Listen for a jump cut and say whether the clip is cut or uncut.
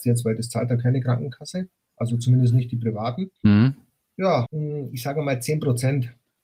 cut